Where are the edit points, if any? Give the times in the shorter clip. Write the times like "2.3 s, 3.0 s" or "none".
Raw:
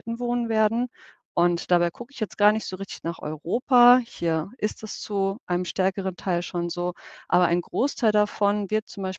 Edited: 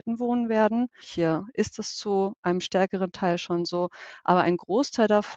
1.0 s

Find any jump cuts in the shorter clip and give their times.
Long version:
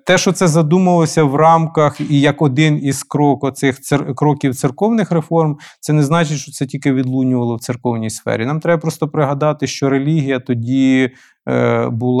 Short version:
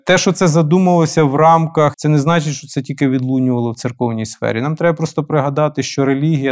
1.9 s

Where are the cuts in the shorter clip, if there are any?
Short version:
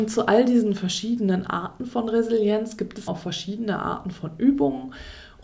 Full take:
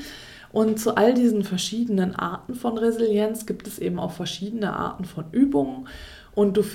3.1 s

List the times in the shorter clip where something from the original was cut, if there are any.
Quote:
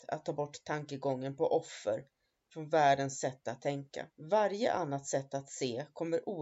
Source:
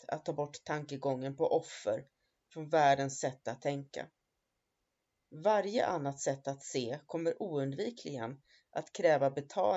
4.1 s

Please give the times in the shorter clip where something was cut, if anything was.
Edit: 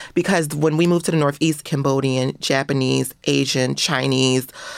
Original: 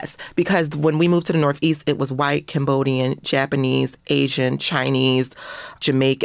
1.6 s

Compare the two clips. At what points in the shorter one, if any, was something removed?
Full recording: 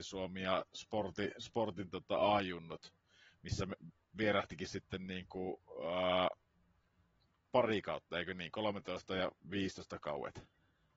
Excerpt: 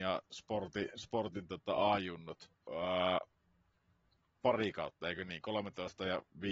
2.7 s

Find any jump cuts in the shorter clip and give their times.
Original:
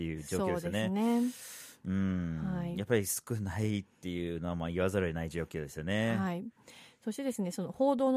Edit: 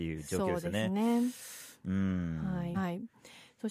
2.7 s

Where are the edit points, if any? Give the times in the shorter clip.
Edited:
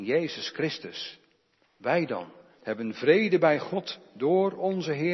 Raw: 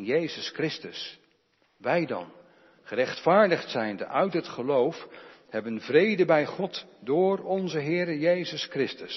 2.5 s

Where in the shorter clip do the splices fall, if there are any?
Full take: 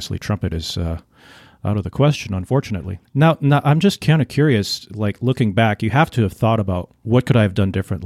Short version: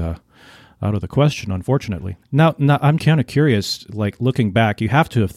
3.0 s

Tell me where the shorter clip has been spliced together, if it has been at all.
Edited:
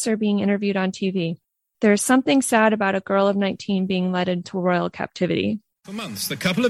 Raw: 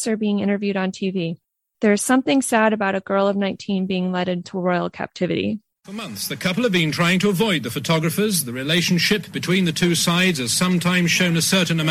none

